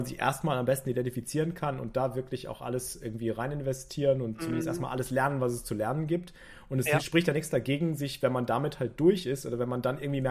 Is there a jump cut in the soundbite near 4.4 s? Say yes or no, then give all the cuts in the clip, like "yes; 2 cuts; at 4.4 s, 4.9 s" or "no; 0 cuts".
no; 0 cuts